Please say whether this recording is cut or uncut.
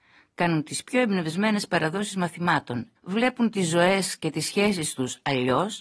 cut